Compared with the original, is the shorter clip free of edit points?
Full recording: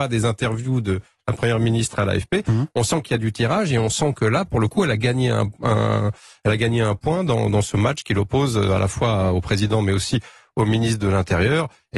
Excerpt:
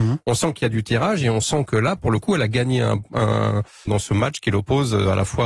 no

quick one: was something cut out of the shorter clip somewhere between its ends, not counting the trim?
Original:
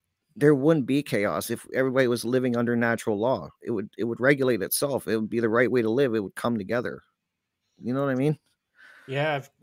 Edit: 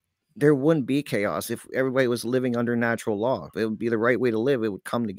yes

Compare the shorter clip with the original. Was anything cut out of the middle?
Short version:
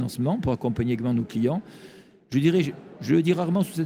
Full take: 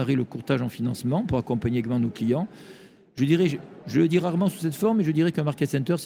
no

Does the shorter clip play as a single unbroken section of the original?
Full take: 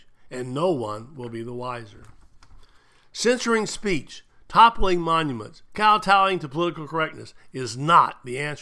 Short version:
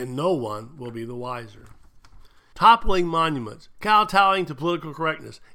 no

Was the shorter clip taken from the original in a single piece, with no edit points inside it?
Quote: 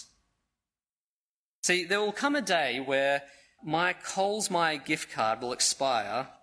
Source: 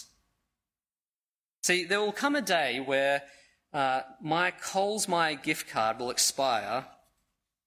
no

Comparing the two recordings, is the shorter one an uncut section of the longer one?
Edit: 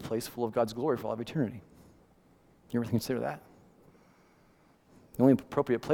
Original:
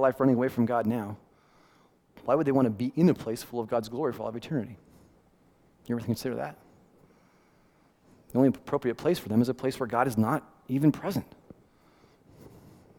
yes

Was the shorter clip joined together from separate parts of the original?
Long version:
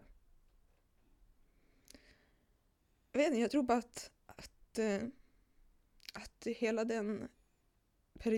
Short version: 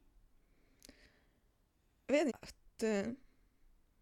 yes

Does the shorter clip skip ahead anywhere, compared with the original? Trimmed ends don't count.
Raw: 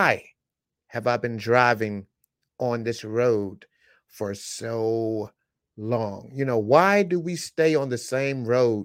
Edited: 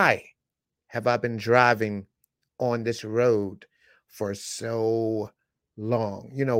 no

